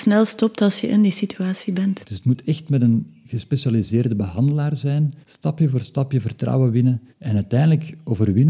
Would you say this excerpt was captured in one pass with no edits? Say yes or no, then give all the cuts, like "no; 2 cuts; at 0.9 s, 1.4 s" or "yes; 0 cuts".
no; 3 cuts; at 2.0 s, 5.2 s, 7.1 s